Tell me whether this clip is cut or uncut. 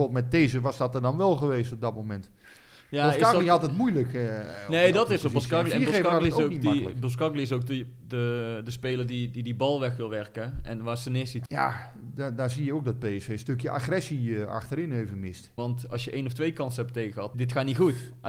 cut